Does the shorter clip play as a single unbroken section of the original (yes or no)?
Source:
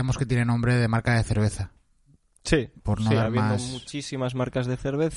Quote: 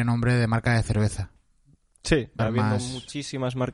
no